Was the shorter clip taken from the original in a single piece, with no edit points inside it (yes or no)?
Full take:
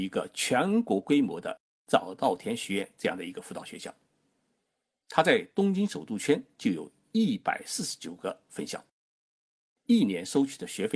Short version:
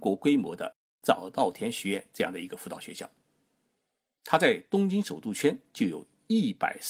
yes